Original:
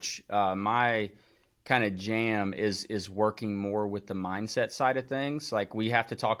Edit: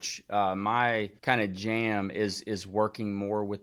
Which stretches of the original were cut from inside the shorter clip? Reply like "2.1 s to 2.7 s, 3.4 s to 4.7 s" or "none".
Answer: 1.2 s to 1.6 s